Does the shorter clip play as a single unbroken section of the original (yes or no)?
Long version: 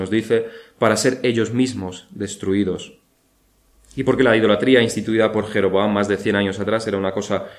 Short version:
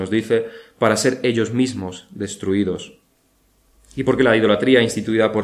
yes